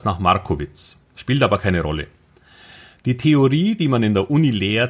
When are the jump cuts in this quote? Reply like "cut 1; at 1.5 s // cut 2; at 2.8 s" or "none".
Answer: none